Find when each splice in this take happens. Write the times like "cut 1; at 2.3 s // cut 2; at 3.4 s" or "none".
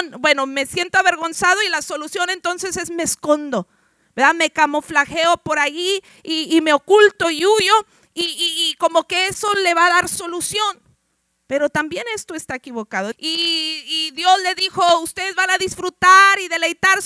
cut 1; at 13.1 s